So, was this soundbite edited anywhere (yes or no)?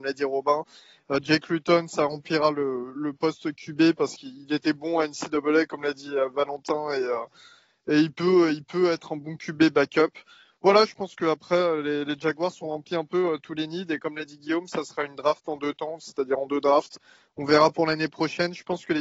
no